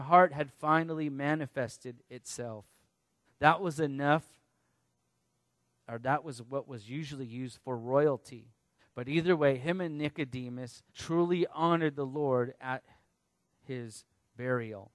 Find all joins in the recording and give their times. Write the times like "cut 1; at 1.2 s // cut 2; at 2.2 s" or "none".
cut 1; at 3.2 s // cut 2; at 8.8 s // cut 3; at 10.9 s